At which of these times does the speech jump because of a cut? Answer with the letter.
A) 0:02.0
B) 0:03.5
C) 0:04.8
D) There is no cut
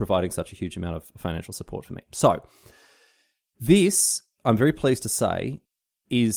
D